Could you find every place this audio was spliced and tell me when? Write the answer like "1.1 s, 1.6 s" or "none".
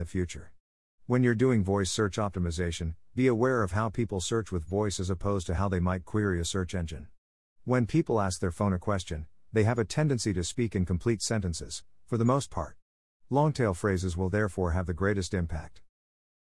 none